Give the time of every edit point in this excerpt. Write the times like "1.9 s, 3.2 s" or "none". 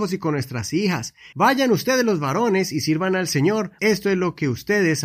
1.3 s, 3.8 s